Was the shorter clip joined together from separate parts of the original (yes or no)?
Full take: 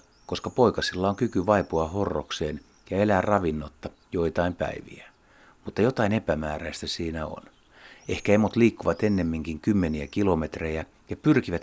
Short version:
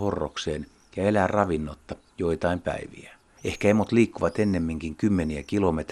yes